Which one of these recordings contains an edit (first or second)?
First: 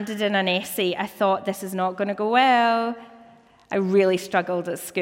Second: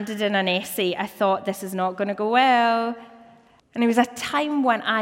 second